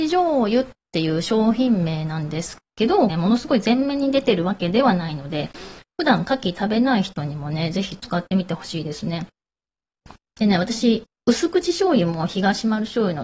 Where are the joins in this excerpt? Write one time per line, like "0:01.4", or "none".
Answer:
0:03.1